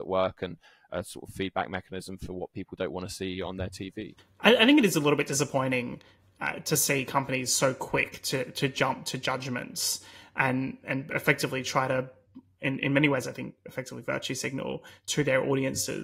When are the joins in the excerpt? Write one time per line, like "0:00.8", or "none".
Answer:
none